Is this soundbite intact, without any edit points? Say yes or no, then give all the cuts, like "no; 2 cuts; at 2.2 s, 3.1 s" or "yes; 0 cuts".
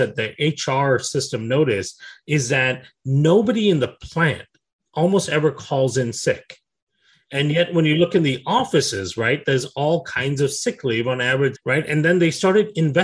no; 1 cut; at 11.5 s